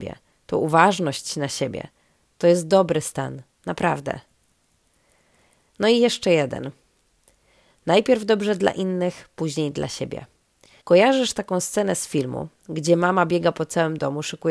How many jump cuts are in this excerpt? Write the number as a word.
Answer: one